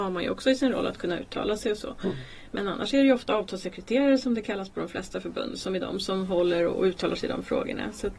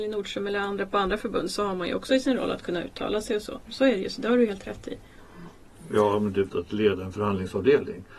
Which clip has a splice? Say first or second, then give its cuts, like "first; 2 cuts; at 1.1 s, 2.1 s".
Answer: second; 2 cuts; at 3.6 s, 6.5 s